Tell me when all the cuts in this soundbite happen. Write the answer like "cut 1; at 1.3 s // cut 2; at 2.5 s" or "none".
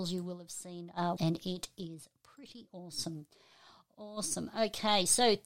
cut 1; at 1.2 s